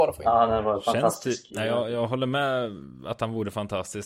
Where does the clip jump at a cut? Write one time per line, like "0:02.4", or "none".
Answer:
0:01.5